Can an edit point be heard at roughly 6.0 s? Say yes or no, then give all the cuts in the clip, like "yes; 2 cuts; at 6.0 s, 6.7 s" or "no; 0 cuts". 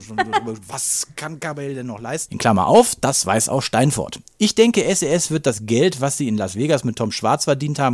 no; 1 cut; at 2.3 s